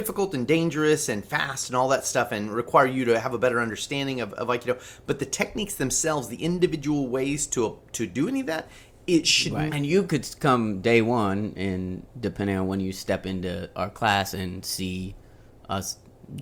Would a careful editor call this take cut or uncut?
cut